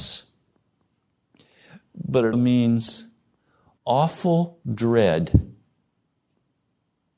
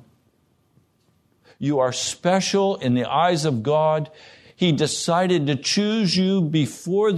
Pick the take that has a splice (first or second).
first